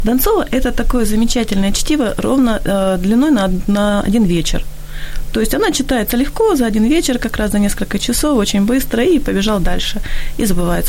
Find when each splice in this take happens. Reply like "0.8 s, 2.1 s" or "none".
none

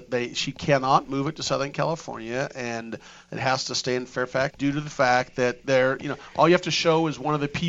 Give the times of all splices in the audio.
4.5 s

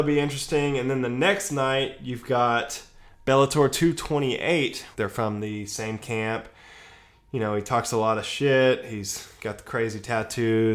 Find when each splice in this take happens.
4.9 s

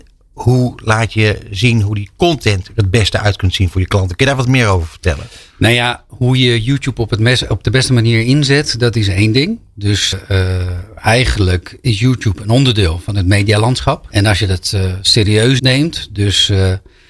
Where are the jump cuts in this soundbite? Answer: 10.1 s, 14.1 s, 15.6 s

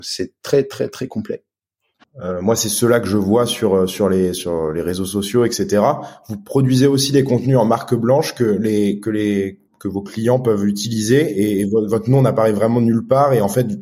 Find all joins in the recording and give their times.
2.0 s, 9.7 s

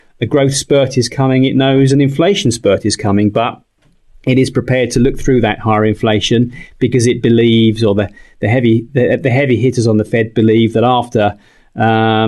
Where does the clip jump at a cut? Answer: none

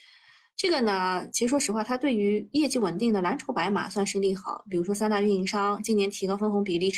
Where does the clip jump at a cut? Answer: none

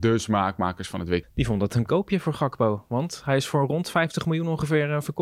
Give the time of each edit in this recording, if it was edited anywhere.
1.2 s

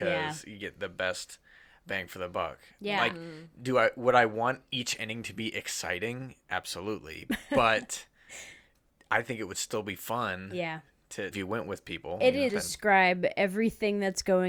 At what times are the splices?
11.3 s, 12.5 s

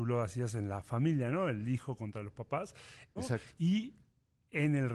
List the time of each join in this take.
3.2 s

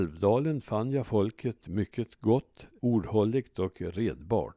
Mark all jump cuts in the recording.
2.8 s

